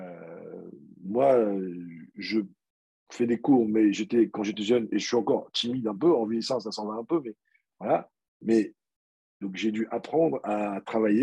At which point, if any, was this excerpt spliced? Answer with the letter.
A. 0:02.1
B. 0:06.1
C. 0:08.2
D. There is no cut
D